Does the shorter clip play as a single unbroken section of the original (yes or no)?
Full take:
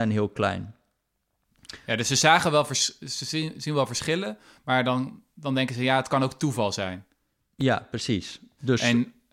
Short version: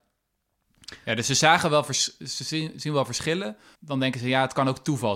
no